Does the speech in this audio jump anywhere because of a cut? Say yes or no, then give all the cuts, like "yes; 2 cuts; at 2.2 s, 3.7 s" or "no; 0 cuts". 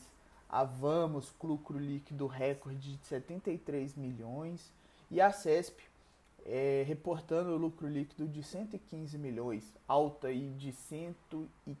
yes; 1 cut; at 1.4 s